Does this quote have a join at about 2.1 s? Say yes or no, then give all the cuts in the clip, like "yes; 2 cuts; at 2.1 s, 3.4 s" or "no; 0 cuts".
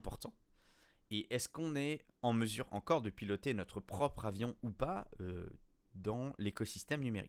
yes; 1 cut; at 2.1 s